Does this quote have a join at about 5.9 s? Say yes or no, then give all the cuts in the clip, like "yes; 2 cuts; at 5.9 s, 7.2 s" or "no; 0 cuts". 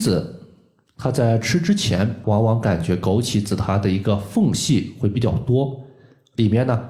no; 1 cut; at 2.2 s